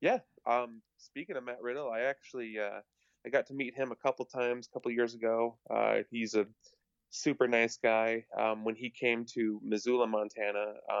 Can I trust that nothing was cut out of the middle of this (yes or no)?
yes